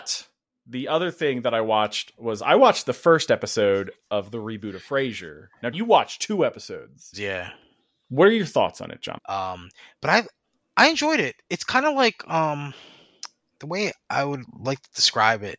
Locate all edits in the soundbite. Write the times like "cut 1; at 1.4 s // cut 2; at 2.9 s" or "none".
cut 1; at 5.7 s // cut 2; at 7.1 s // cut 3; at 9.2 s